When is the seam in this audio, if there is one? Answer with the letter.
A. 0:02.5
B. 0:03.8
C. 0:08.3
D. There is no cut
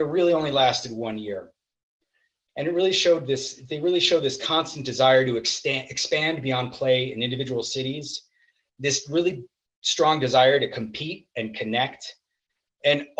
A